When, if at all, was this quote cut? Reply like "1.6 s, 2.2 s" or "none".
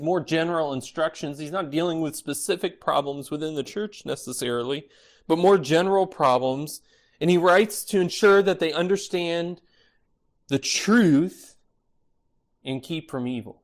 none